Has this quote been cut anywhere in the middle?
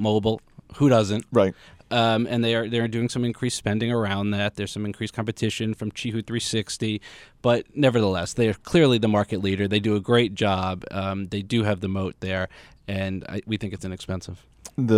no; 0 cuts

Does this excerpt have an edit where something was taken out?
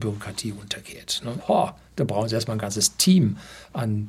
yes; 1 cut; at 1.4 s

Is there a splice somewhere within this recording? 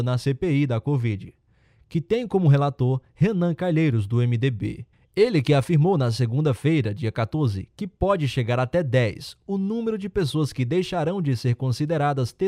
no; 0 cuts

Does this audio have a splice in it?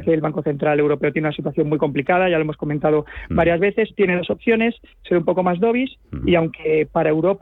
yes; 1 cut; at 6.2 s

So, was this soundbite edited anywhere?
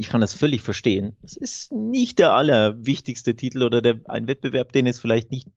no; 0 cuts

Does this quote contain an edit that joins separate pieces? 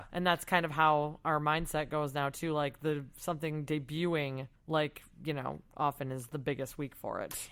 yes; 1 cut; at 4.6 s

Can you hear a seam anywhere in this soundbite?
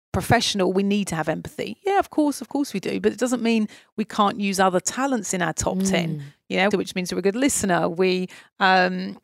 yes; 1 cut; at 6.7 s

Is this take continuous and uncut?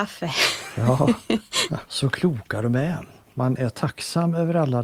no; 2 cuts; at 1.8 s, 3.2 s

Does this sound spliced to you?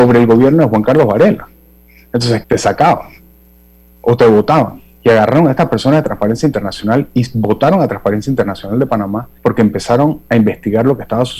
yes; 2 cuts; at 2.4 s, 9.4 s

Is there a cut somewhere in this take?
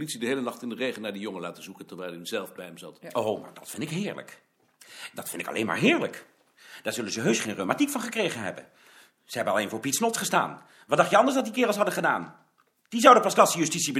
no; 0 cuts

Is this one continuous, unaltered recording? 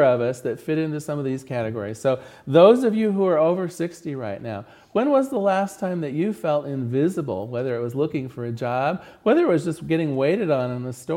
yes; 0 cuts

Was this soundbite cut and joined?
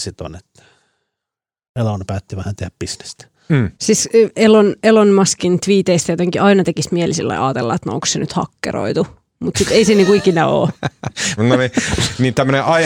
yes; 2 cuts; at 3.7 s, 11.4 s

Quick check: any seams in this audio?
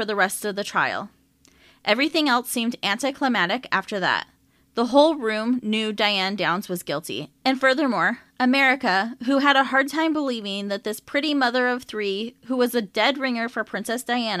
no; 0 cuts

